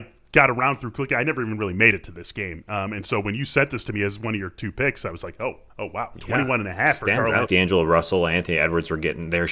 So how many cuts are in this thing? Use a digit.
2